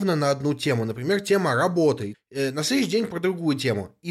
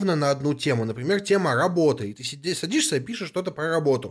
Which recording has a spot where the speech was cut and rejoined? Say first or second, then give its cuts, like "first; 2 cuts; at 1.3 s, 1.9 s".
first; 1 cut; at 2.1 s